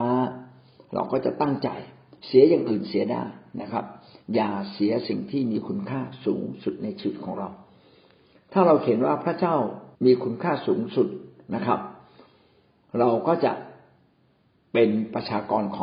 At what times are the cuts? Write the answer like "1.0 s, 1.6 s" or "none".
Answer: 9.9 s